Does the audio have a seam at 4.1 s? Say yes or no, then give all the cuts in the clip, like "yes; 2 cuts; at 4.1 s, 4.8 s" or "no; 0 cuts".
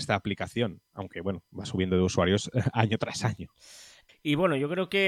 yes; 1 cut; at 4.1 s